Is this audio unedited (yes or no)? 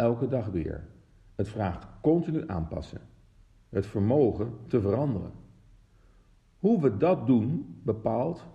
yes